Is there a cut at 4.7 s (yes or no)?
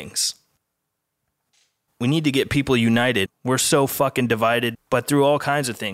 yes